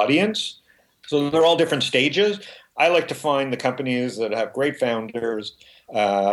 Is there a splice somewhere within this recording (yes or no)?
yes